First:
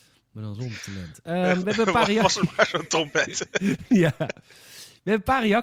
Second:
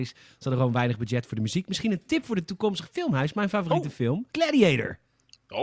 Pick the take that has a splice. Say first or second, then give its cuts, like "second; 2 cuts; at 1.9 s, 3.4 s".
second; 1 cut; at 4.3 s